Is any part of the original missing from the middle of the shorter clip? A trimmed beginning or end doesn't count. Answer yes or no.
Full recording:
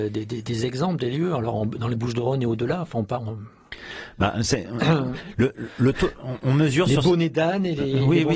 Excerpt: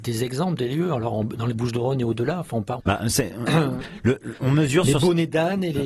yes